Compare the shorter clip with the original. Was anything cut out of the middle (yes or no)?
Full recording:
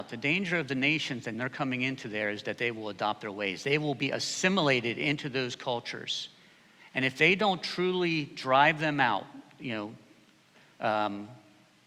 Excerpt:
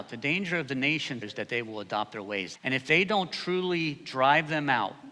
yes